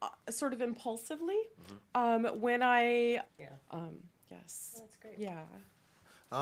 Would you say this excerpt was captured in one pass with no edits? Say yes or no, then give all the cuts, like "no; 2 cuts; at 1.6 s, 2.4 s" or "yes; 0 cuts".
no; 1 cut; at 3.3 s